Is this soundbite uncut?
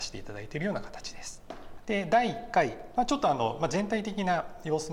no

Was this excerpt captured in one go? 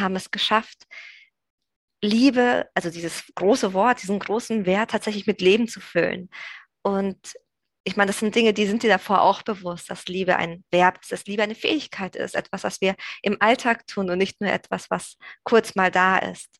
yes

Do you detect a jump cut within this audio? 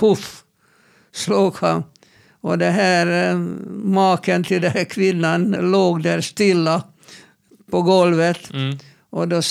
yes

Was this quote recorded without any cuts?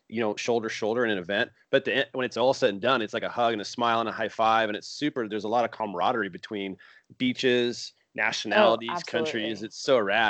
yes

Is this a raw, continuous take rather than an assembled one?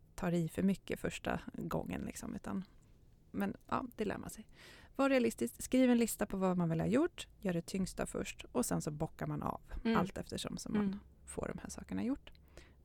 yes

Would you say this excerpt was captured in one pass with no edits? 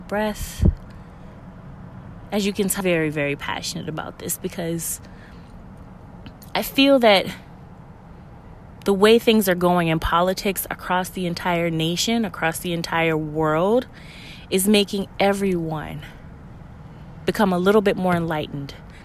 no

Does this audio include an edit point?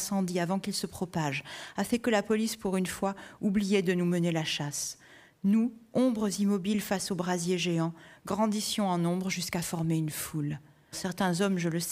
yes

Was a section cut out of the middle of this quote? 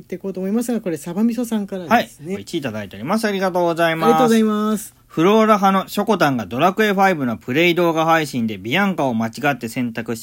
yes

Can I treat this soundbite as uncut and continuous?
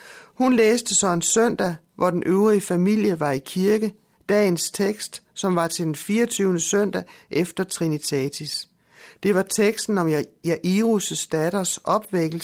yes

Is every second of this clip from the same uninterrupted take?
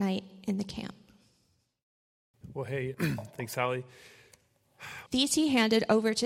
no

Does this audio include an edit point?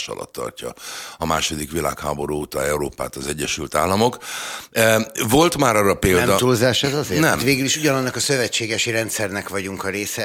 no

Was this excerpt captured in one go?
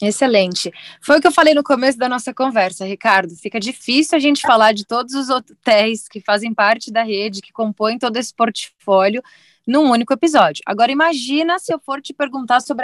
yes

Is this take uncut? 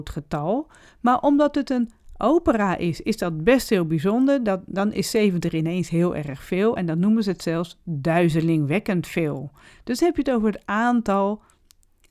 yes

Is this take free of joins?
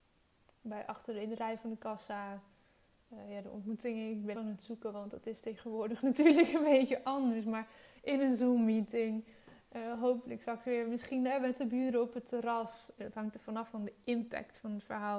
no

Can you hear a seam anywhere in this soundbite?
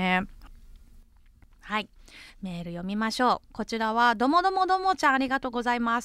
no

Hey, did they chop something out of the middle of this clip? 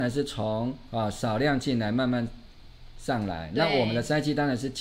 no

